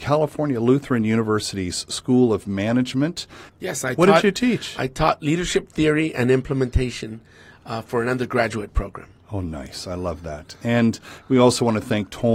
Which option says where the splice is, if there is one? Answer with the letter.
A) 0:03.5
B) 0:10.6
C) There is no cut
A